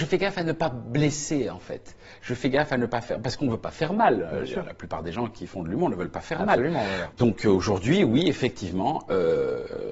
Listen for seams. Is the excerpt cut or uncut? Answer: cut